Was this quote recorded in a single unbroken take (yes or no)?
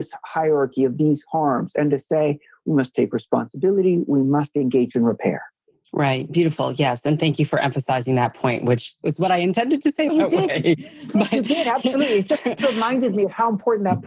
no